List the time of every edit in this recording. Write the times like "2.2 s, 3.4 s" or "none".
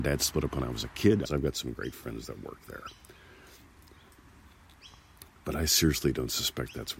1.2 s